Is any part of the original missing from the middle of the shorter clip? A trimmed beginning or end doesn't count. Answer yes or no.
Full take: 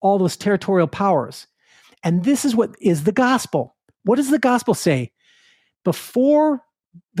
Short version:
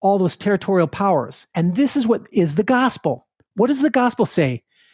yes